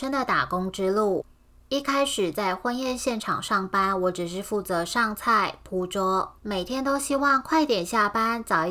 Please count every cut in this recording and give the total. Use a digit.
1